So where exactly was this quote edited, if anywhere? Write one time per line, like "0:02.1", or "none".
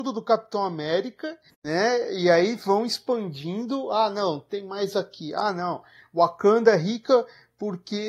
none